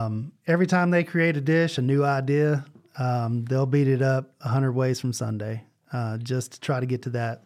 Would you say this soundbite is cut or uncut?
uncut